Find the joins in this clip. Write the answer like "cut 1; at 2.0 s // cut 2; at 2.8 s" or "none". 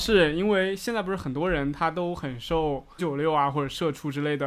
cut 1; at 3.0 s